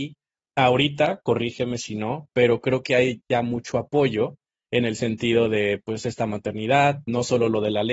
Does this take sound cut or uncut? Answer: uncut